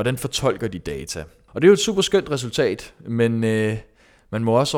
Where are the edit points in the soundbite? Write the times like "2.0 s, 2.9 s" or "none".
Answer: 1.5 s